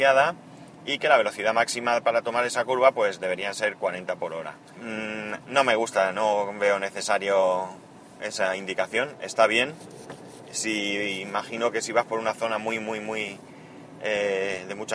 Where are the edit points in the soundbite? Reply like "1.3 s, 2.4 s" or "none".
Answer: 4.7 s